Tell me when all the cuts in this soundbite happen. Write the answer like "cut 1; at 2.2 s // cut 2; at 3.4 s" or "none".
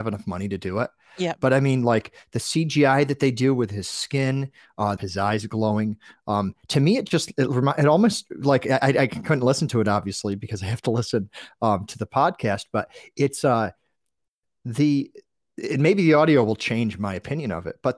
cut 1; at 5.0 s